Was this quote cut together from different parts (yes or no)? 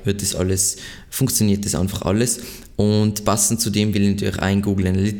no